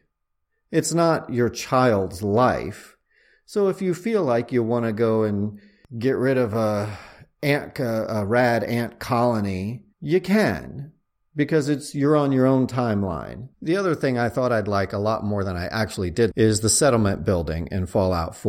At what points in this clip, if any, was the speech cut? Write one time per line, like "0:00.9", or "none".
0:09.9
0:13.5
0:16.3